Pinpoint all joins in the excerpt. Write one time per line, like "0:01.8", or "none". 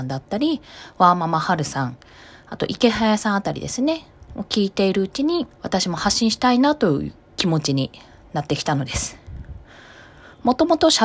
0:05.5